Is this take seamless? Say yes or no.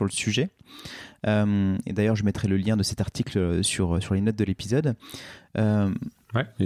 yes